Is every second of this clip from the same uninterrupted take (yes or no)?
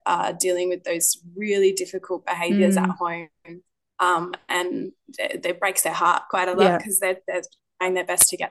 yes